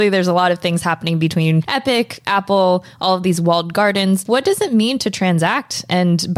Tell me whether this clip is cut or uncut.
uncut